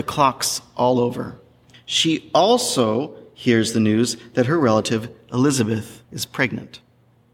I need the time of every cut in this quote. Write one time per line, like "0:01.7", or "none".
0:01.7
0:06.0